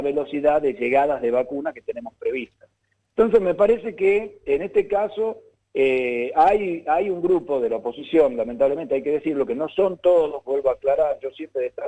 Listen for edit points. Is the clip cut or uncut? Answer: uncut